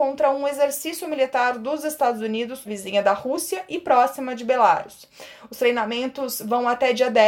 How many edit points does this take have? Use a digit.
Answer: 1